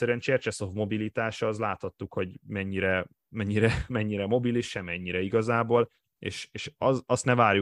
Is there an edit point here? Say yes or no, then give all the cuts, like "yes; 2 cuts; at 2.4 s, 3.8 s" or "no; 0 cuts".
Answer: no; 0 cuts